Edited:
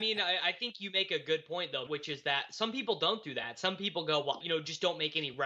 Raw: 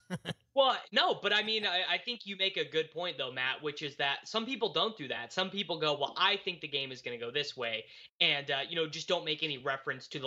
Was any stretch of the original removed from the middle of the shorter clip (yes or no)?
yes